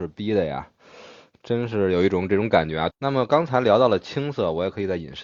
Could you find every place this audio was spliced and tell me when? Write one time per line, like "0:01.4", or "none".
0:02.9